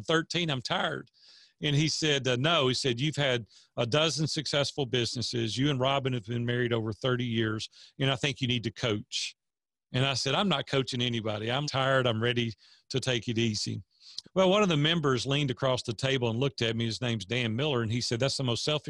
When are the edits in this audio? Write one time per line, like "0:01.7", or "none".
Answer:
0:11.6
0:14.2